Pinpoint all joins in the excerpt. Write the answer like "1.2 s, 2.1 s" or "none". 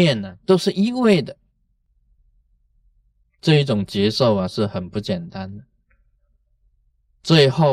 none